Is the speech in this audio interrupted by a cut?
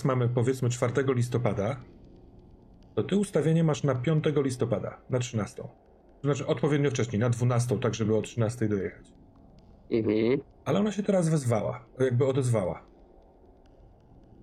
no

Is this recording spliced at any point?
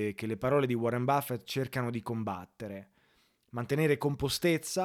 no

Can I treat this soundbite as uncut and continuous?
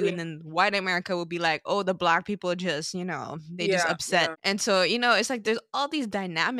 no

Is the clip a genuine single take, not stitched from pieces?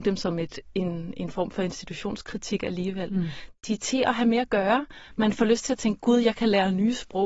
yes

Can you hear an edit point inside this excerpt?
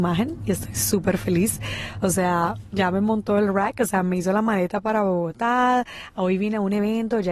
no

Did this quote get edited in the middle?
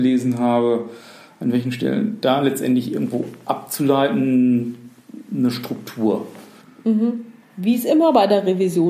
no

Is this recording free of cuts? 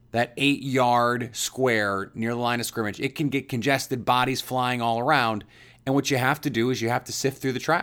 yes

